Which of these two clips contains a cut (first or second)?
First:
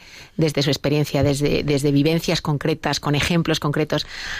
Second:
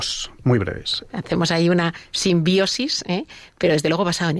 second